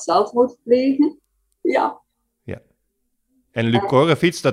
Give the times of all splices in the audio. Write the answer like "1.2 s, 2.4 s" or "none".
1.6 s

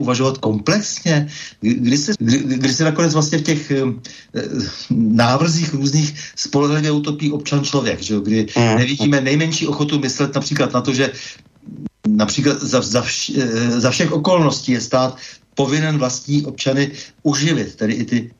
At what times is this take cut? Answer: 2.2 s

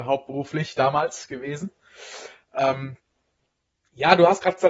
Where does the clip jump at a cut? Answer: none

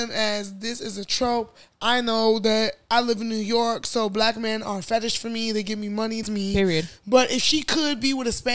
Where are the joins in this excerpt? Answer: 6.2 s

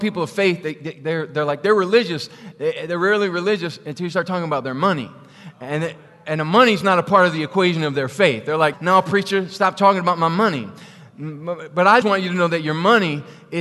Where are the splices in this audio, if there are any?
8.7 s, 12.0 s

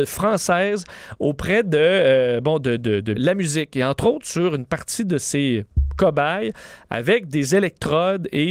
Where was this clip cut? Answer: 3.1 s

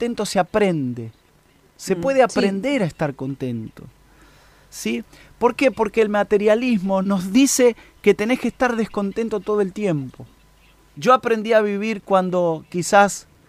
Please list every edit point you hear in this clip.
7.0 s, 10.9 s

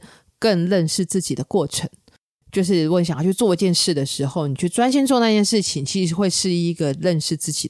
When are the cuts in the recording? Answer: none

